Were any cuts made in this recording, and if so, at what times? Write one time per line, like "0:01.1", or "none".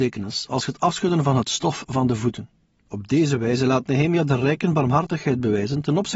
0:02.8